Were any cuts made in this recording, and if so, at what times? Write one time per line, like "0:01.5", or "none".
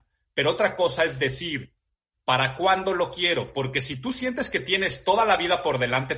none